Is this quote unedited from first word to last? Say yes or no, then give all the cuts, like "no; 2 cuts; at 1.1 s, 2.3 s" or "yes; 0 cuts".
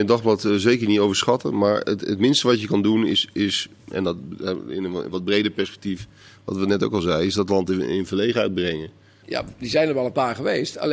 no; 1 cut; at 9.2 s